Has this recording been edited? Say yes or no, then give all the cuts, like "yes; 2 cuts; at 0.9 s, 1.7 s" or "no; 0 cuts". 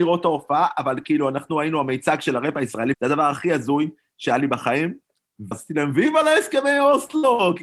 yes; 2 cuts; at 2.9 s, 5.5 s